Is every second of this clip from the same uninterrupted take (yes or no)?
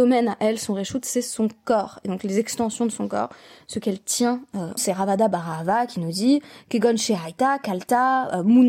no